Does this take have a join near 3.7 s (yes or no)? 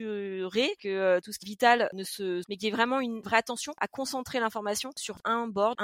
no